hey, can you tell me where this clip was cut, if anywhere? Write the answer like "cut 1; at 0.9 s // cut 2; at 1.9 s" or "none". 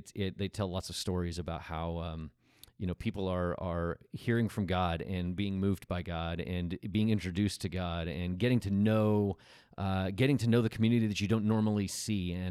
none